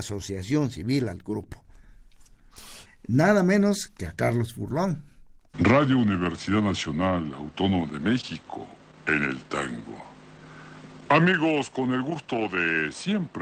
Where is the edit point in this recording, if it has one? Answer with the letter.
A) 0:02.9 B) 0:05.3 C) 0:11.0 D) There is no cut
A